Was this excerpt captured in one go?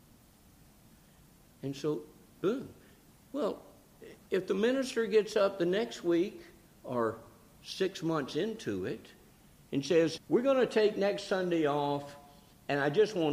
no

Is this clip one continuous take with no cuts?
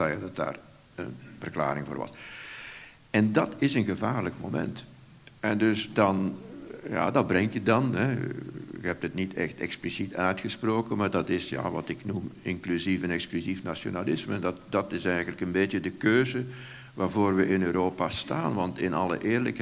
yes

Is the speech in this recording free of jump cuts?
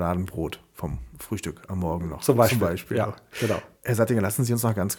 no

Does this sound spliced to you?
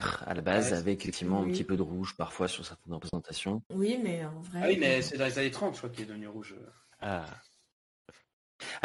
no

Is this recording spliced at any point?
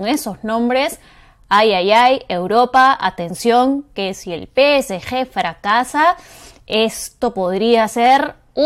no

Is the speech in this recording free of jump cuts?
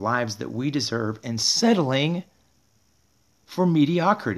yes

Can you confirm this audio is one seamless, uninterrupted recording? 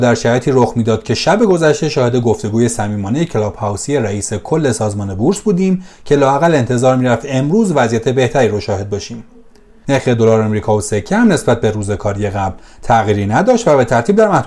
no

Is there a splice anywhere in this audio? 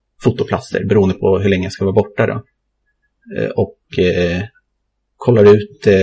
no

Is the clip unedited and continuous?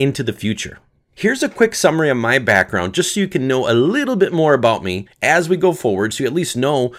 yes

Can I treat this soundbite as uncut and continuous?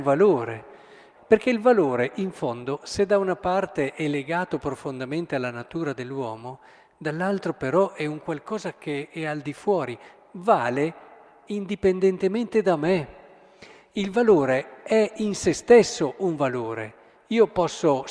no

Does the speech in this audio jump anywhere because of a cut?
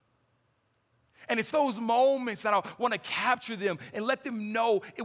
no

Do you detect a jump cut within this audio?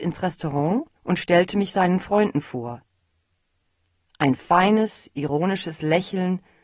yes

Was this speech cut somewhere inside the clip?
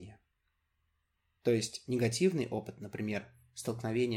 yes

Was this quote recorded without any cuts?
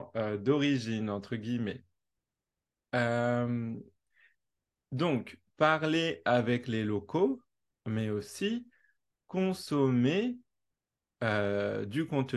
yes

